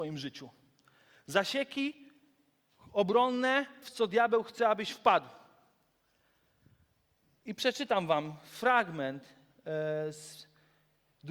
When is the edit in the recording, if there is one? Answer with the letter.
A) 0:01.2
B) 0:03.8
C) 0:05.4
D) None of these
B